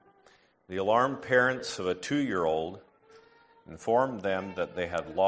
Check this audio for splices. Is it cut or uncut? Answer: uncut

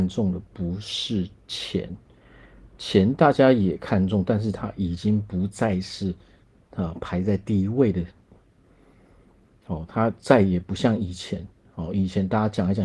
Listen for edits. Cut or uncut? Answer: uncut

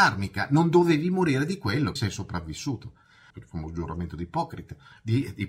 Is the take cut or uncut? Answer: cut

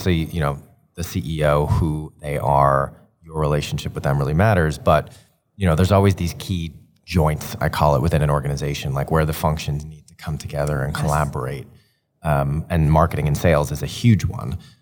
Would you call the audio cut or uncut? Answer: uncut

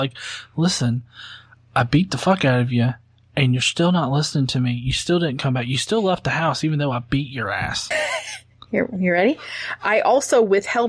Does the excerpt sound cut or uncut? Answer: cut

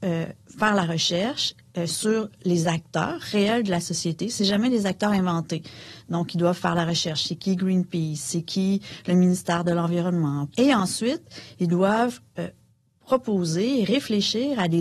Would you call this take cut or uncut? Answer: cut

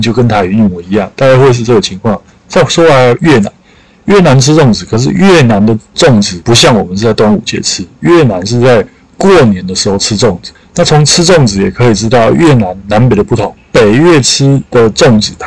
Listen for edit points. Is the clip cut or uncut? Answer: uncut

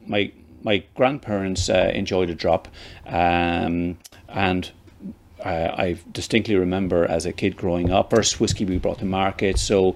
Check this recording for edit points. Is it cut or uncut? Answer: cut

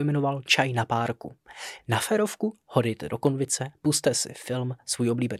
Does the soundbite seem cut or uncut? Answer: cut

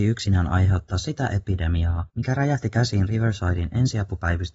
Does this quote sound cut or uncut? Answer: cut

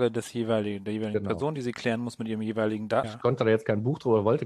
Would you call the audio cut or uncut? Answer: cut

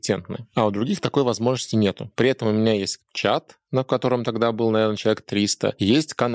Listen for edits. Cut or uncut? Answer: uncut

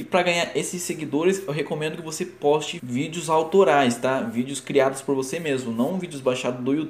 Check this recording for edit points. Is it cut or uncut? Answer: cut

